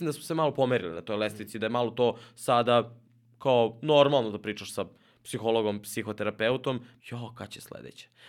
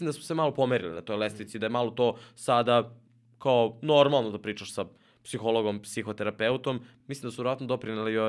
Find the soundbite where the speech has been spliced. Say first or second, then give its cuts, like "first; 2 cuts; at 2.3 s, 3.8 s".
first; 1 cut; at 7.0 s